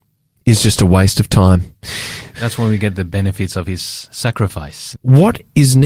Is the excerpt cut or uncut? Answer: cut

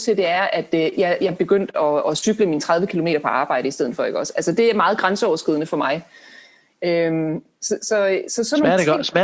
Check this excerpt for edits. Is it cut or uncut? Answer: uncut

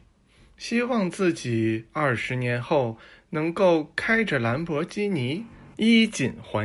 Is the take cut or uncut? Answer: cut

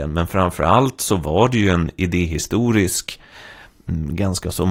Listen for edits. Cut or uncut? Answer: uncut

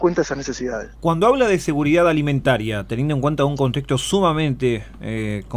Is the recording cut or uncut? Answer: cut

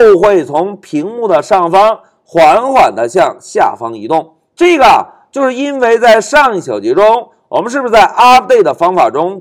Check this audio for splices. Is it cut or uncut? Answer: uncut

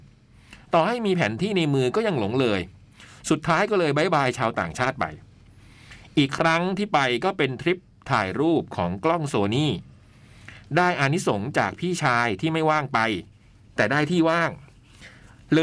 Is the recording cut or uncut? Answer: uncut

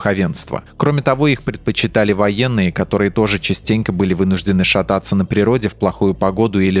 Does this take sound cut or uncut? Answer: uncut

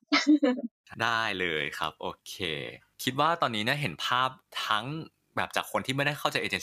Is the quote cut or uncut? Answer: uncut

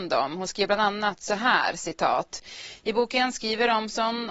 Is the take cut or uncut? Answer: cut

